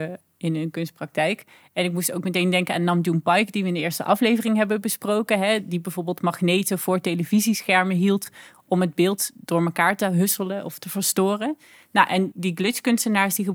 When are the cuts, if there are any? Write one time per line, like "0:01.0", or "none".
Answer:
0:12.3